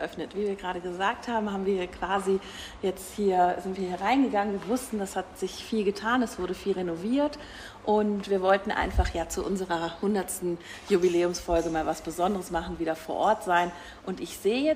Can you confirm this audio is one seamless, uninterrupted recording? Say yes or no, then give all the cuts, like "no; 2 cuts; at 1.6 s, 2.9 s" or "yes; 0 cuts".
yes; 0 cuts